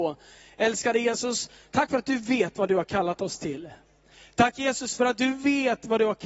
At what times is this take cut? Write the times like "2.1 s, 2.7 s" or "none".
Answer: none